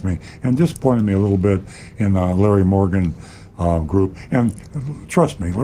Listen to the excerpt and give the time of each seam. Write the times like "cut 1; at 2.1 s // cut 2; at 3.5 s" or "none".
none